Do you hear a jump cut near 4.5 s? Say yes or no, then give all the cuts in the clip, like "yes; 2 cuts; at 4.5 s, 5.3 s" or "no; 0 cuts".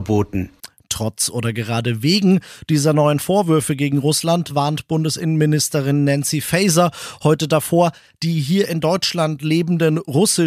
no; 0 cuts